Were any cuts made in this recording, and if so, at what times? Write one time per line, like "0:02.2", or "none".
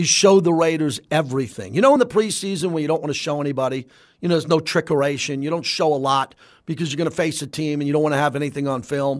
none